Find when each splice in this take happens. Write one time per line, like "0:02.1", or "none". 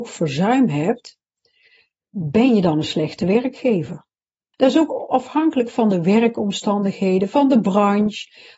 0:04.5